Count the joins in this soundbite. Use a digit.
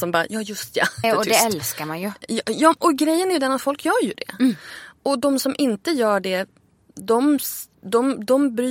1